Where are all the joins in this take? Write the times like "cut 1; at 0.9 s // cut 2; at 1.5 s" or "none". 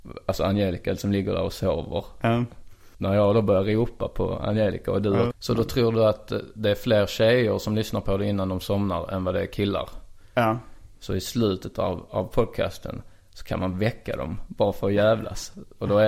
cut 1; at 5.3 s // cut 2; at 10.9 s